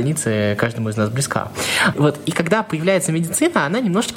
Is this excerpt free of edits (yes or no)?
no